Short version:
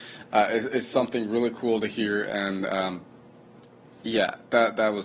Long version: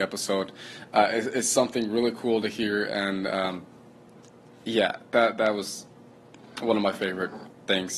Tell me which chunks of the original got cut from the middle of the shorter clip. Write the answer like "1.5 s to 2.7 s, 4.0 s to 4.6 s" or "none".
none